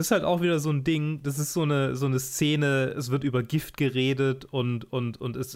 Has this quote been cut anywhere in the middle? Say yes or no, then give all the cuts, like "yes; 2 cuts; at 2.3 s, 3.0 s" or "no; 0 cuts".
no; 0 cuts